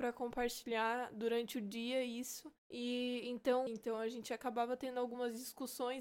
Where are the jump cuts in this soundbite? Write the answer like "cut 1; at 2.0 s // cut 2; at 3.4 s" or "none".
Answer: cut 1; at 2.6 s // cut 2; at 3.7 s

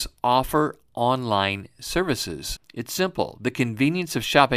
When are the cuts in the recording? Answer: cut 1; at 2.6 s

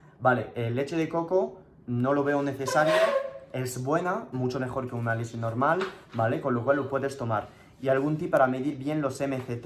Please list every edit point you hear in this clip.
cut 1; at 4.3 s

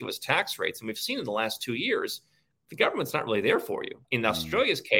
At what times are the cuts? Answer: cut 1; at 4.0 s

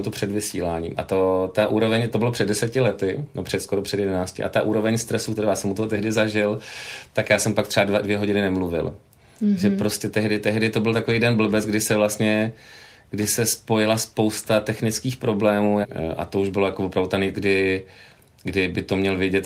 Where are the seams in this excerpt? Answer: cut 1; at 15.8 s // cut 2; at 17.3 s

